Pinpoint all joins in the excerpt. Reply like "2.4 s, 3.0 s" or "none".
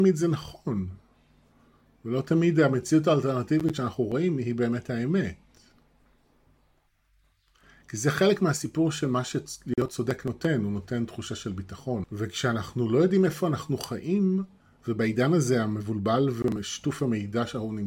12.0 s